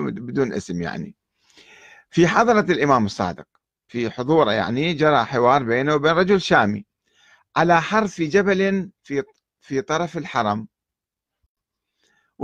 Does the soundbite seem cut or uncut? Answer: uncut